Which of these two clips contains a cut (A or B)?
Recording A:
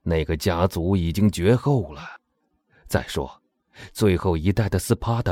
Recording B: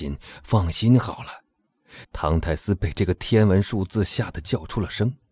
B